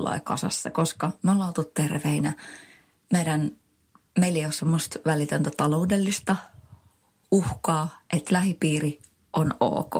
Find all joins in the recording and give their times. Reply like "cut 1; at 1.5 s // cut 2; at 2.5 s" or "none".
none